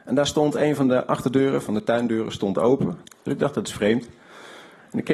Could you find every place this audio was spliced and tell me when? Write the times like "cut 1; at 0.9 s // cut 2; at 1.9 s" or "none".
cut 1; at 3.0 s